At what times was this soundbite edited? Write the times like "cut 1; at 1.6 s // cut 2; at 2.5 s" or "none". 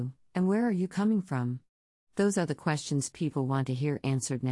none

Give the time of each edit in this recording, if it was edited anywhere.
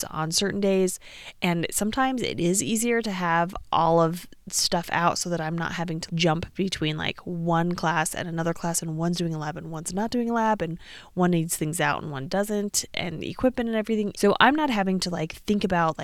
cut 1; at 6.1 s // cut 2; at 14.1 s

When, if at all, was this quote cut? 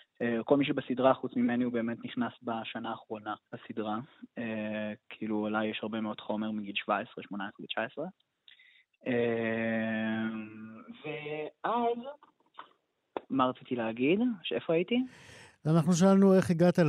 cut 1; at 3.4 s

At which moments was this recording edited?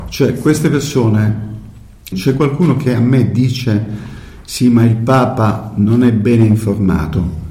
cut 1; at 2.1 s

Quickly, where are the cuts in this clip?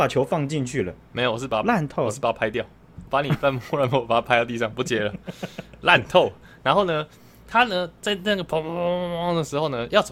none

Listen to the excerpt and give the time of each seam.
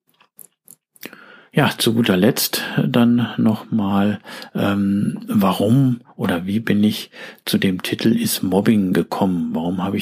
none

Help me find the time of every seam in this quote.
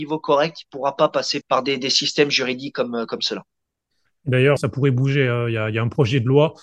cut 1; at 1.4 s // cut 2; at 4.6 s

